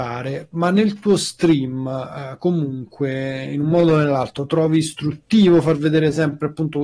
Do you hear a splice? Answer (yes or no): no